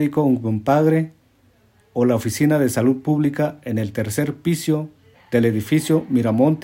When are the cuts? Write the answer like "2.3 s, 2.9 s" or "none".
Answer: 5.1 s